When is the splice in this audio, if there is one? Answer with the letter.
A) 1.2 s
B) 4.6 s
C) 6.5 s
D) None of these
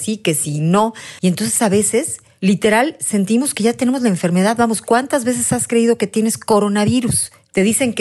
A